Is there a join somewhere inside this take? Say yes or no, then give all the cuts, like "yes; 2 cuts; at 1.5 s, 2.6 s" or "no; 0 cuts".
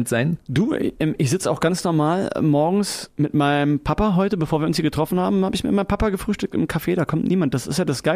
no; 0 cuts